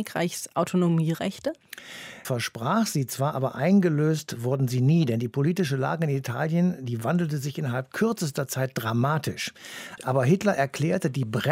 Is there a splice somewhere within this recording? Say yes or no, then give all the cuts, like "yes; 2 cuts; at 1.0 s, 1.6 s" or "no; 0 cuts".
yes; 2 cuts; at 2.2 s, 10.0 s